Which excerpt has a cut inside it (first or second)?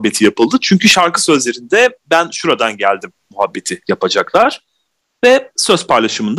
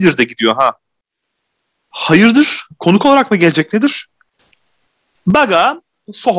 second